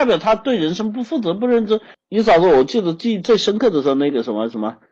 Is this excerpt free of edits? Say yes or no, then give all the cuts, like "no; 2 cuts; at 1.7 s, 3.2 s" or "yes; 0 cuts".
no; 1 cut; at 1.9 s